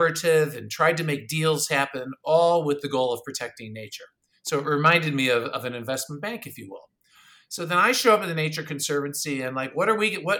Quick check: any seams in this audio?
no; 0 cuts

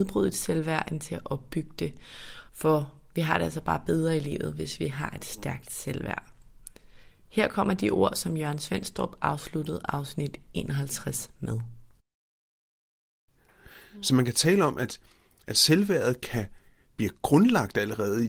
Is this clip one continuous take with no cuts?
no; 1 cut; at 2.5 s

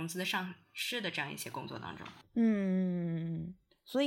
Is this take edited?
yes; 1 cut; at 2.3 s

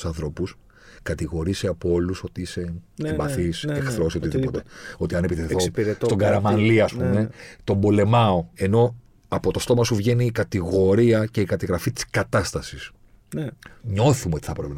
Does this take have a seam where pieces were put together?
yes; 2 cuts; at 8.5 s, 13.8 s

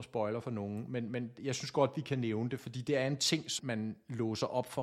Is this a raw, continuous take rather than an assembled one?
no; 1 cut; at 3.6 s

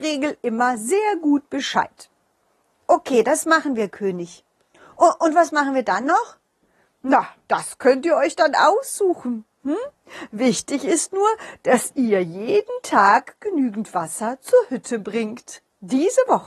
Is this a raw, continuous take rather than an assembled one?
yes; 0 cuts

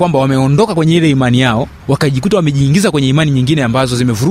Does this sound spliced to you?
no; 0 cuts

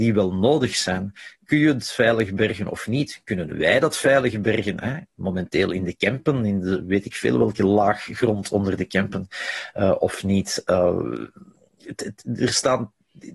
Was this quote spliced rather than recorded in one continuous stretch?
no; 0 cuts

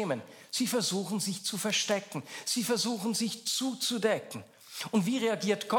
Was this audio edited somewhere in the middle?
no; 0 cuts

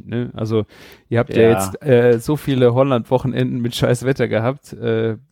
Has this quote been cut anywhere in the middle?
no; 0 cuts

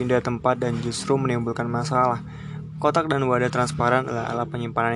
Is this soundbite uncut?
yes; 0 cuts

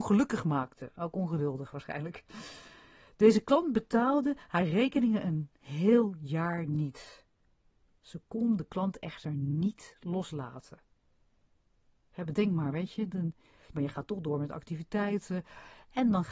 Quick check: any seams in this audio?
yes; 2 cuts; at 7.9 s, 13.7 s

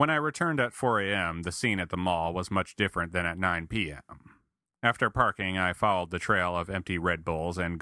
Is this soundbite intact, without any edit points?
yes; 0 cuts

